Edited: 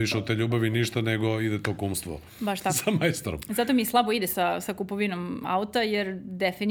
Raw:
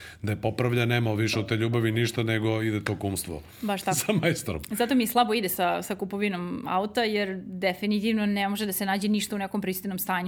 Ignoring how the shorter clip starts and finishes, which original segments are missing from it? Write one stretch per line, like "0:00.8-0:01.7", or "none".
none